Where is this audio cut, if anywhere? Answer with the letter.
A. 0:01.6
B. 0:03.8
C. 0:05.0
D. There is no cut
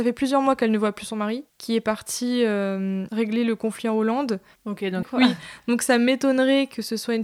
C